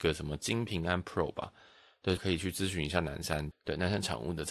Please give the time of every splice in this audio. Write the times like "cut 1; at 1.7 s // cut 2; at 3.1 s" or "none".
cut 1; at 2.2 s // cut 2; at 3.5 s